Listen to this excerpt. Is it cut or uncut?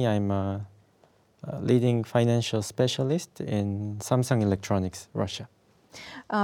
uncut